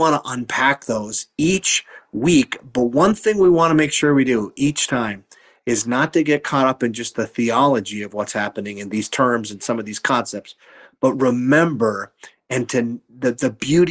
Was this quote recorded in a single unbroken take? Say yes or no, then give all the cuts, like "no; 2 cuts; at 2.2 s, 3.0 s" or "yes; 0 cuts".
yes; 0 cuts